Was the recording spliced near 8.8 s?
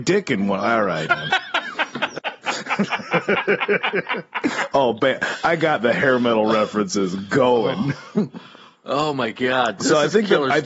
no; 2 cuts; at 1.1 s, 2.2 s

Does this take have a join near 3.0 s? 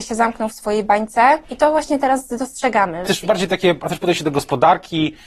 yes; 2 cuts; at 1.4 s, 3.0 s

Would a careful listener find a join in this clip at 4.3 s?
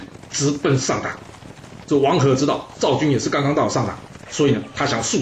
yes; 1 cut; at 4.3 s

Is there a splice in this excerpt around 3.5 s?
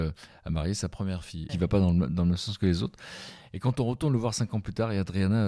no; 1 cut; at 1.5 s

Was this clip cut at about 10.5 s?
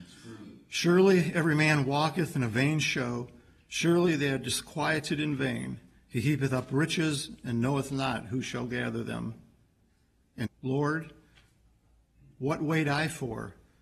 yes; 1 cut; at 10.5 s

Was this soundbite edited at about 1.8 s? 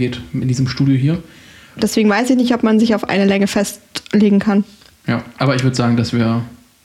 yes; 1 cut; at 1.8 s

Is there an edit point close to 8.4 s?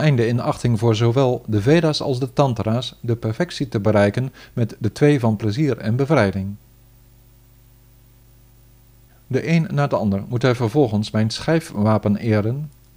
no; 0 cuts

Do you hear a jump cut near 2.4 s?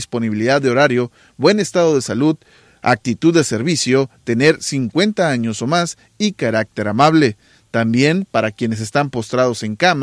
no; 0 cuts

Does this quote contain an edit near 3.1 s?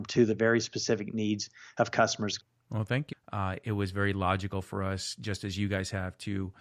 yes; 1 cut; at 3.1 s

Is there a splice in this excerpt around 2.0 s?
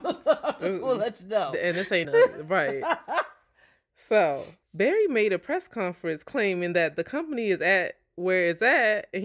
yes; 2 cuts; at 2.0 s, 4.6 s

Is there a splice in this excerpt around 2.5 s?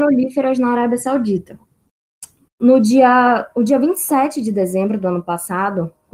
yes; 1 cut; at 2.5 s

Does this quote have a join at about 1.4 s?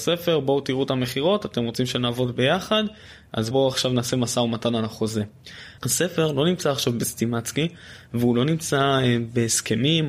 no; 2 cuts; at 3.5 s, 5.8 s

